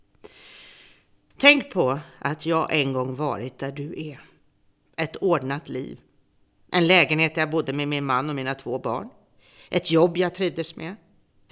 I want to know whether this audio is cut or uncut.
cut